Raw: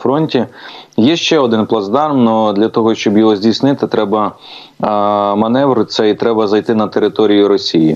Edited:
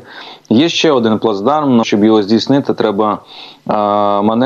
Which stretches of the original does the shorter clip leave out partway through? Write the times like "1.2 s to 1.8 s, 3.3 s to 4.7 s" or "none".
2.3 s to 3.0 s